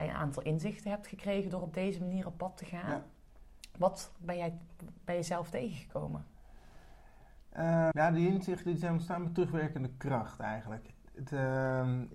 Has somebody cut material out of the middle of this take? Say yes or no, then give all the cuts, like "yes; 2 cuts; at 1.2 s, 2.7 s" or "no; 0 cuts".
yes; 1 cut; at 7.9 s